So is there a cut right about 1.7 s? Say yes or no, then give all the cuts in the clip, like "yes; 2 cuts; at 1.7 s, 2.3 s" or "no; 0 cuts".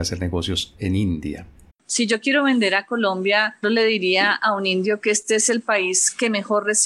yes; 2 cuts; at 1.7 s, 3.6 s